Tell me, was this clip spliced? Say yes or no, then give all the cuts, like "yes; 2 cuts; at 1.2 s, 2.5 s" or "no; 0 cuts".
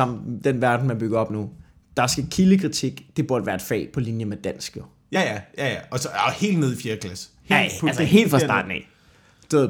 no; 0 cuts